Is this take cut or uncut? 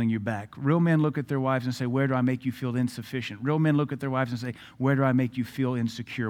uncut